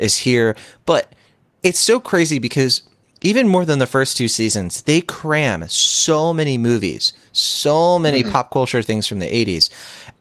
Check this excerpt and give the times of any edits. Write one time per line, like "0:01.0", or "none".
none